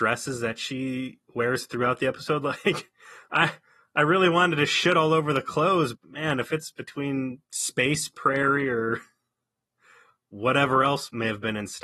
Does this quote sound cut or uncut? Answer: cut